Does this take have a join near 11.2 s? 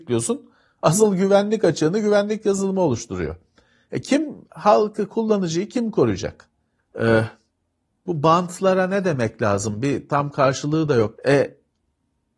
yes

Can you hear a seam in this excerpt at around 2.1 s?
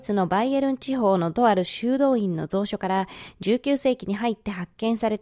no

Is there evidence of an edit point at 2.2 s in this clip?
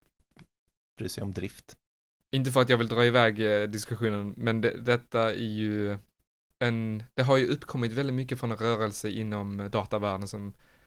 yes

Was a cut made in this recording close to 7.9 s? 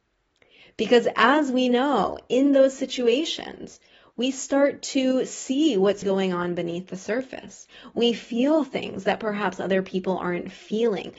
no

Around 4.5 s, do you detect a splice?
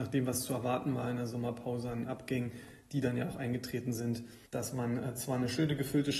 yes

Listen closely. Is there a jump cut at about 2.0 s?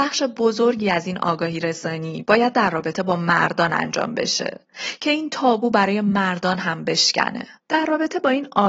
no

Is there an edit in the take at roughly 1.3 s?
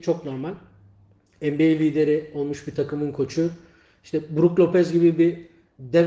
no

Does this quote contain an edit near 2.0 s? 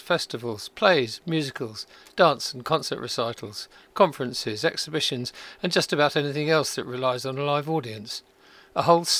no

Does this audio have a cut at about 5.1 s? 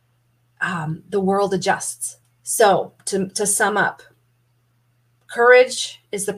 no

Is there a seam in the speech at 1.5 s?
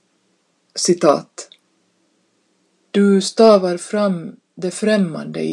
no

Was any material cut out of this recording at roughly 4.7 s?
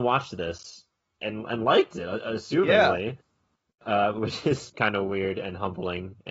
yes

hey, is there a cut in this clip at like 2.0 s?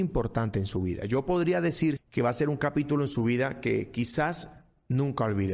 yes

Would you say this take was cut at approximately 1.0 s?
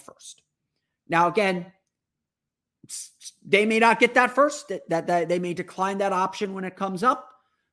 no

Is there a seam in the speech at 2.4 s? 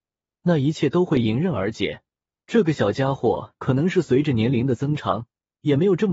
yes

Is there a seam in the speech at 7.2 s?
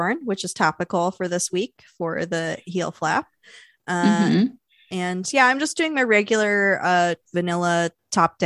no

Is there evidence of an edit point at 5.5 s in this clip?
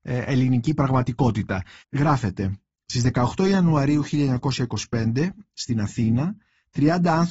yes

